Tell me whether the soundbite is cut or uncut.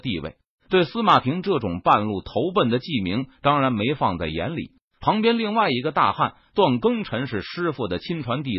cut